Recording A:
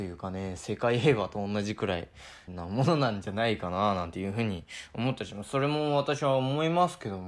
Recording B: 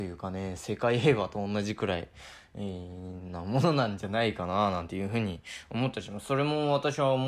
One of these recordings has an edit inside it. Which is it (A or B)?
A